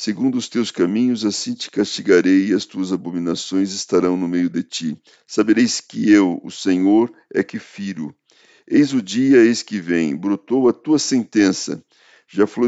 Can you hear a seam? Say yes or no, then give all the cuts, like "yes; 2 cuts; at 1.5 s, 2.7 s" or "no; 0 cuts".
no; 0 cuts